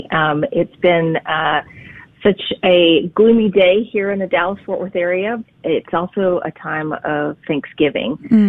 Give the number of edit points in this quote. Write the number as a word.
one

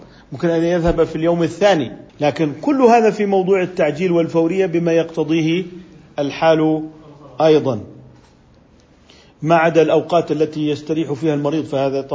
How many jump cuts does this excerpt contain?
one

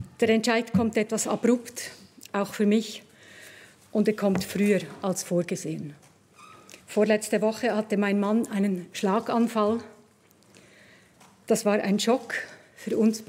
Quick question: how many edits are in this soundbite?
one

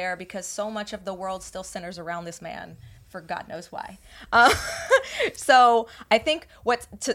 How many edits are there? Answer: zero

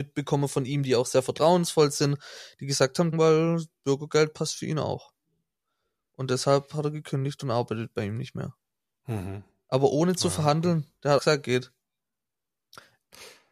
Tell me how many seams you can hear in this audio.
two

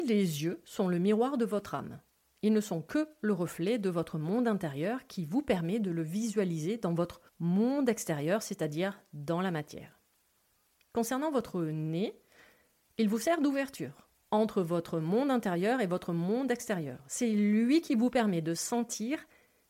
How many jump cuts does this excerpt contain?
one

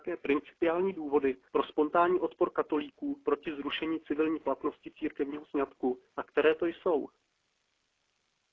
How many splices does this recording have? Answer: two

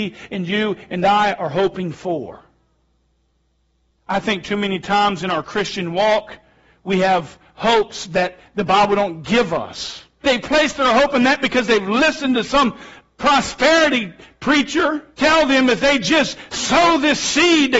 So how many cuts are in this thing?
two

